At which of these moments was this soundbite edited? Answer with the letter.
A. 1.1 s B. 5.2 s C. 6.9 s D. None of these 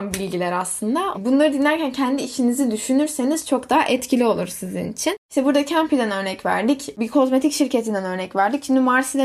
A